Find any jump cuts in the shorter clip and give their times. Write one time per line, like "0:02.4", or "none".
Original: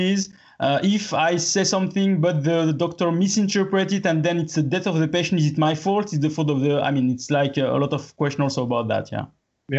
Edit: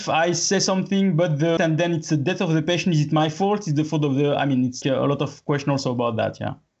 0:01.6
0:04.8